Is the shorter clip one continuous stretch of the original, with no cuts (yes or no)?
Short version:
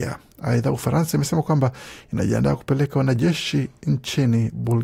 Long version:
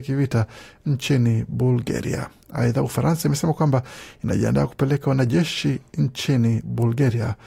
yes